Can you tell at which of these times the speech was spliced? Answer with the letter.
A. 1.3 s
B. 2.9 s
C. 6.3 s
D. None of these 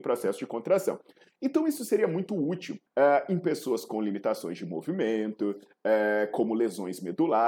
B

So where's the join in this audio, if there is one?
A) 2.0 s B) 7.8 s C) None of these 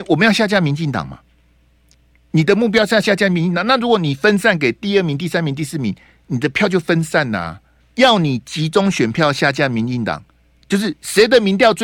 B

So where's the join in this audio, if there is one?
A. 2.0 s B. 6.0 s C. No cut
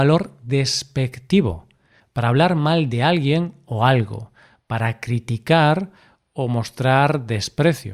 A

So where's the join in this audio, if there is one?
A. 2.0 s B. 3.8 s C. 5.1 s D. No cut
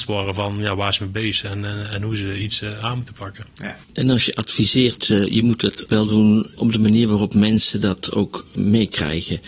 B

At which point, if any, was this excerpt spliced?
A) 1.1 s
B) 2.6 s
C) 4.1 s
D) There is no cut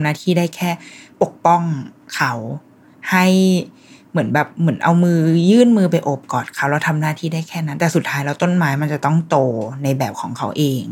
D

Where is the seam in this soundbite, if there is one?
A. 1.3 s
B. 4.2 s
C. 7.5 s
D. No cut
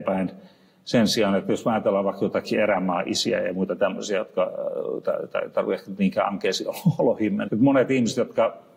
C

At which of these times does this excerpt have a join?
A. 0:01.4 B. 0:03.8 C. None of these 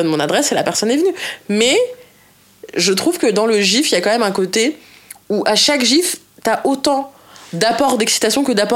C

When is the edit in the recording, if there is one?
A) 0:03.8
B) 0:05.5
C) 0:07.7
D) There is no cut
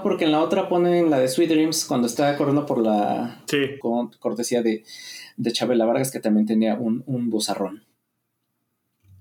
A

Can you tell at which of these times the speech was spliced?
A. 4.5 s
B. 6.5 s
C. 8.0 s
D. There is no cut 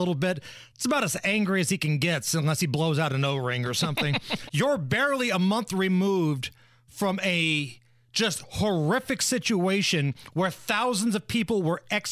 A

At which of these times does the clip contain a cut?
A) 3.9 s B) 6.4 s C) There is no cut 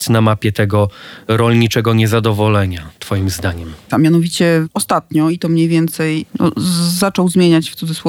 A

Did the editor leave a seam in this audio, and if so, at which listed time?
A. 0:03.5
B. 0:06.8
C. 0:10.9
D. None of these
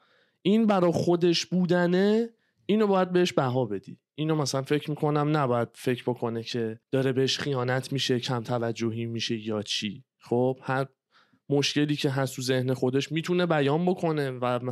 B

